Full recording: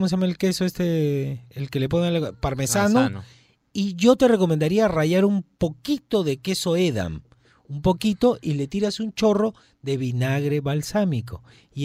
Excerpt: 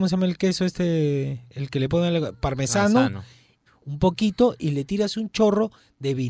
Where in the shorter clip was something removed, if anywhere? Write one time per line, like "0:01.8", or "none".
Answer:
0:03.7